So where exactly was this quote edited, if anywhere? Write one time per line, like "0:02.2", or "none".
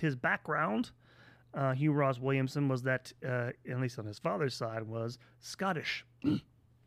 none